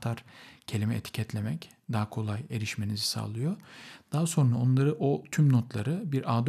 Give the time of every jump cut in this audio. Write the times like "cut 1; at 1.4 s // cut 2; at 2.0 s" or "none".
none

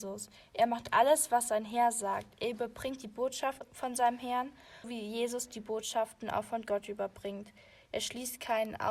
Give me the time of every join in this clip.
cut 1; at 4.8 s

